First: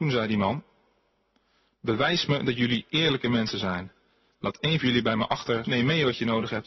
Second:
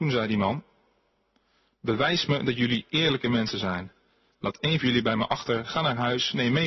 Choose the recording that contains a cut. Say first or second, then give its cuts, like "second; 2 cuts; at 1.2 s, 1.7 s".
first; 1 cut; at 5.6 s